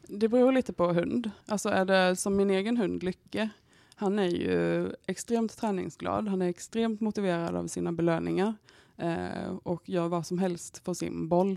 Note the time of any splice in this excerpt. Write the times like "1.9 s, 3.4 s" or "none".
1.4 s